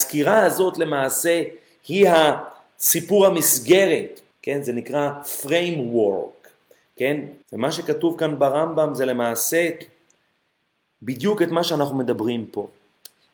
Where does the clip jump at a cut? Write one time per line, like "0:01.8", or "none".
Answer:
0:04.3
0:07.4